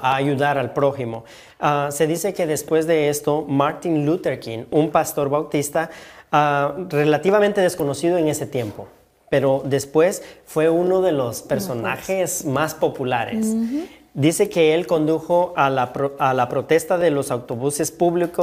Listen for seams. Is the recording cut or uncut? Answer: uncut